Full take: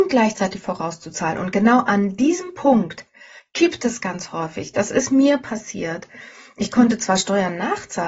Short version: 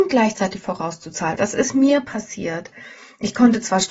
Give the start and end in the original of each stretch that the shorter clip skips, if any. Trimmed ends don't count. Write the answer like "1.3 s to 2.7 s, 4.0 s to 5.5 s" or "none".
1.4 s to 4.7 s